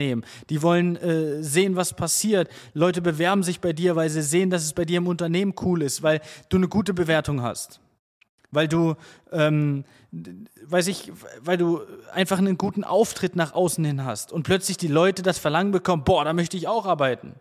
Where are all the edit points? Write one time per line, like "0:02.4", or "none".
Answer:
none

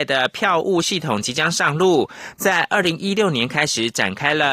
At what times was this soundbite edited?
0:02.4

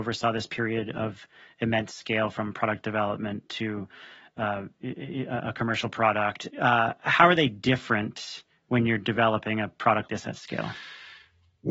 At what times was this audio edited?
0:06.5
0:10.1

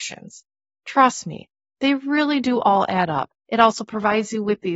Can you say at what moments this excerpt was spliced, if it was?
0:03.3

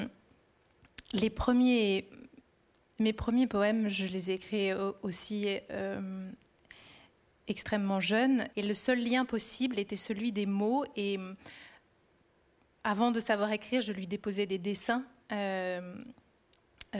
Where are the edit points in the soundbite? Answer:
0:08.5

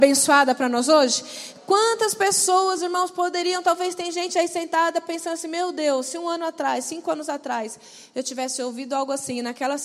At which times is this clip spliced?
none

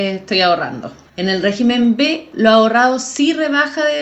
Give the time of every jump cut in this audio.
0:01.1
0:02.3

